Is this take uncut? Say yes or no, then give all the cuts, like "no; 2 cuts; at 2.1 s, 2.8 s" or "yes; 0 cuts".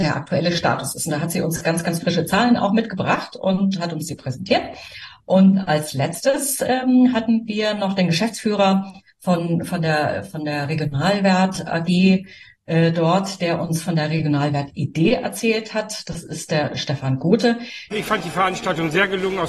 no; 1 cut; at 17.9 s